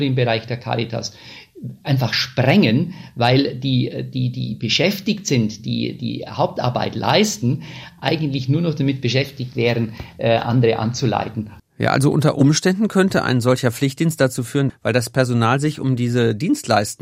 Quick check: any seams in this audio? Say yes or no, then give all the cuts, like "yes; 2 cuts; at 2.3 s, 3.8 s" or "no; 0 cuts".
yes; 2 cuts; at 11.6 s, 14.7 s